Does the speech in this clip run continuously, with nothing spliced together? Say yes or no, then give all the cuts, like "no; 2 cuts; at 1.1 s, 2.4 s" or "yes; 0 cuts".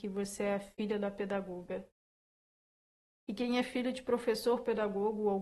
yes; 0 cuts